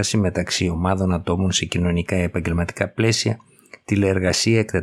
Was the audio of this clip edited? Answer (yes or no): no